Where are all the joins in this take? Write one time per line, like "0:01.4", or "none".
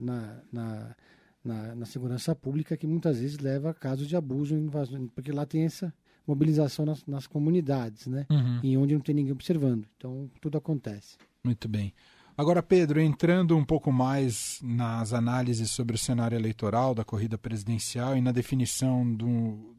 0:10.4